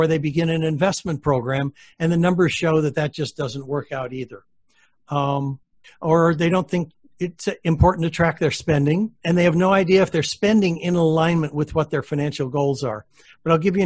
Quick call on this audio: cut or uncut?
cut